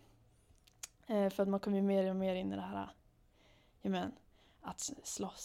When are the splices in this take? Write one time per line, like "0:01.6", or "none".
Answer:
none